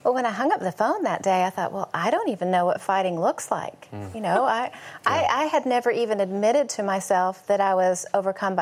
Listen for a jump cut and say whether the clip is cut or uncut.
uncut